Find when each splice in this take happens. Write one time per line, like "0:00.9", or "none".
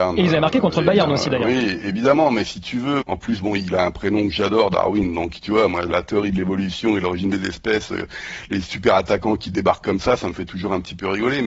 0:03.0

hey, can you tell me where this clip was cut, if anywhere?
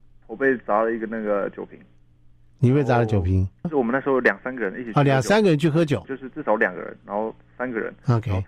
0:03.6
0:06.0

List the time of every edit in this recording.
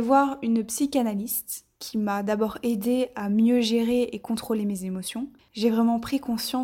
0:05.5

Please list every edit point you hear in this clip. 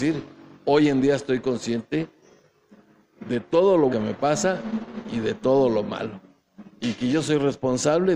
0:03.9

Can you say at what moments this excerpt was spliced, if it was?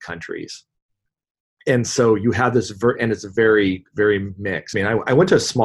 0:04.7

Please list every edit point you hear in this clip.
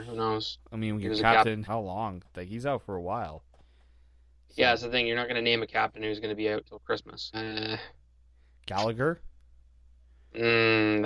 0:01.6
0:07.3

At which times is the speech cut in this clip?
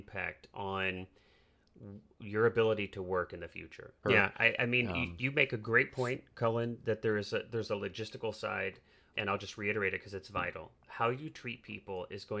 0:04.0
0:09.1

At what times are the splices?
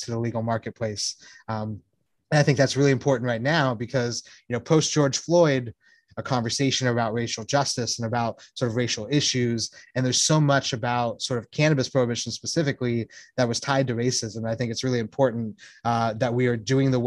0:06.1

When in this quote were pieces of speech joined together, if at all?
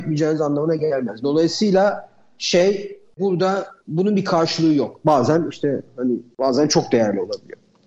0:01.2
0:05.0

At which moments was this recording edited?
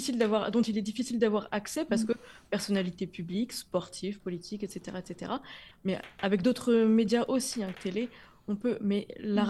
0:05.7
0:07.7

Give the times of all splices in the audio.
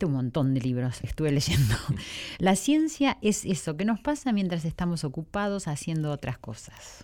0:01.0

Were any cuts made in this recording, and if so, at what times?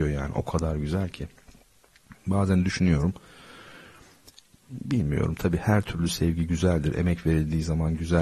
none

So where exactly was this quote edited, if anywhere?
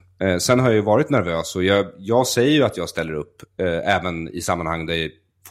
none

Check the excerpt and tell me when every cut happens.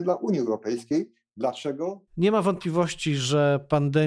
0:02.1

